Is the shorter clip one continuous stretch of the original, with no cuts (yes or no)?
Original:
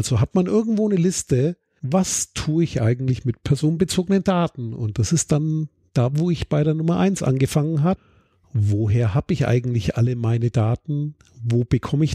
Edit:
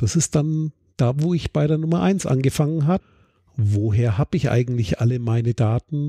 yes